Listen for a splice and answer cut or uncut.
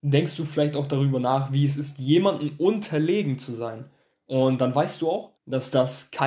cut